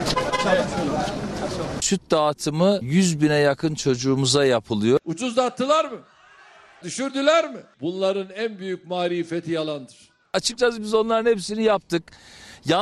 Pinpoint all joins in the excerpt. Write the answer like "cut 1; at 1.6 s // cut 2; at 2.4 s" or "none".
cut 1; at 1.8 s // cut 2; at 5.0 s // cut 3; at 6.8 s